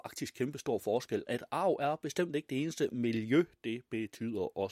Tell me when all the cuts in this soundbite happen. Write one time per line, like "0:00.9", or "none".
0:01.3